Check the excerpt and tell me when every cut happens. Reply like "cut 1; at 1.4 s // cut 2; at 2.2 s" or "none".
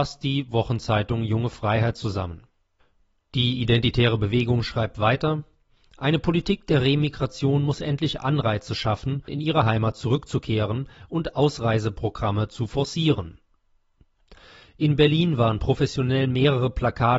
cut 1; at 9.3 s